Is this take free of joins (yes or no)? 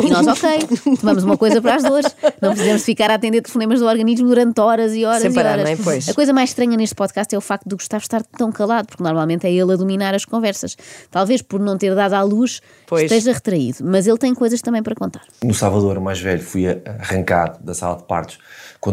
yes